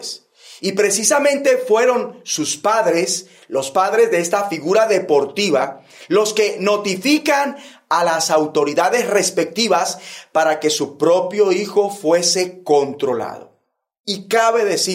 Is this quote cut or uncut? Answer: uncut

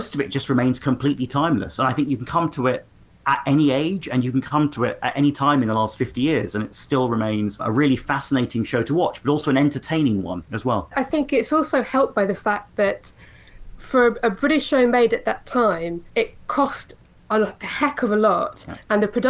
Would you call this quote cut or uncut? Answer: uncut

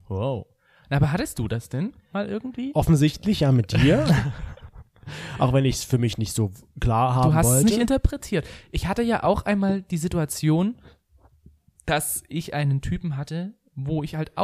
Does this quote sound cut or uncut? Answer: uncut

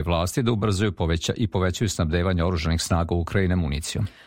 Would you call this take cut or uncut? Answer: uncut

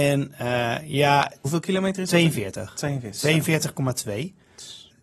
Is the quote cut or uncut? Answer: uncut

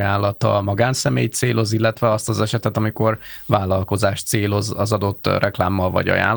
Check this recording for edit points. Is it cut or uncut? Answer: uncut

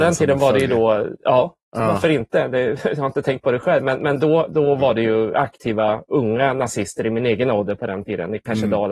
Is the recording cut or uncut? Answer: uncut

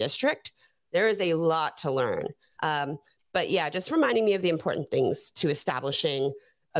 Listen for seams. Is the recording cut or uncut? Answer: cut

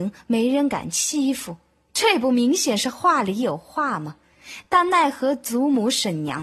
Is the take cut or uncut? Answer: uncut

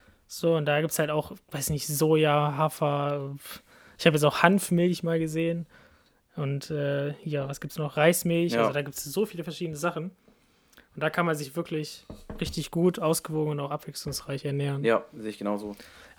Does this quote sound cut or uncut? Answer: uncut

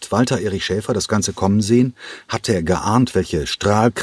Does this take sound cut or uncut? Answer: uncut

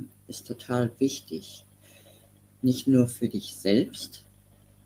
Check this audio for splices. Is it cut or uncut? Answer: uncut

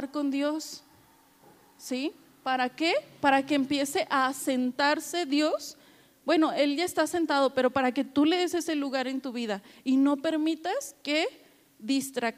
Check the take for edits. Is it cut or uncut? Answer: uncut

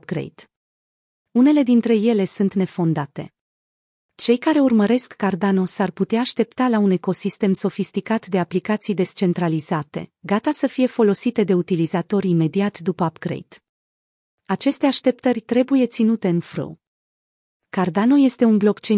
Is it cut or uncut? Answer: uncut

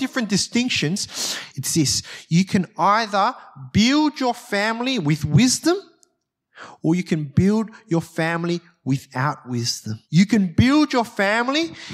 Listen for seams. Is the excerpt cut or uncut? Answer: cut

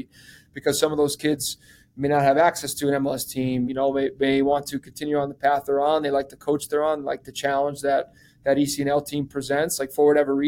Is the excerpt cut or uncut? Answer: cut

